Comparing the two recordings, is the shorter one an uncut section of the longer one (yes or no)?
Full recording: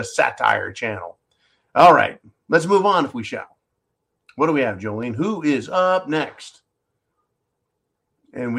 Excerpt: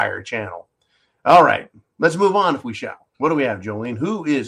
no